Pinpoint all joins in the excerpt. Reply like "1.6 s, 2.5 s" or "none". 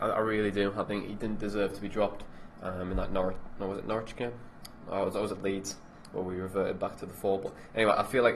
none